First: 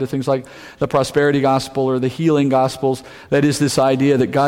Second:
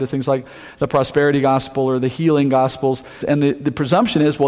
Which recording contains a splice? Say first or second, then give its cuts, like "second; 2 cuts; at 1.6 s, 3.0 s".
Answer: second; 1 cut; at 3.2 s